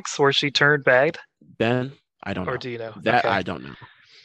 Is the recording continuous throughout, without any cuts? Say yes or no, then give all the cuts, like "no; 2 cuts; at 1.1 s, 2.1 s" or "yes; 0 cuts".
yes; 0 cuts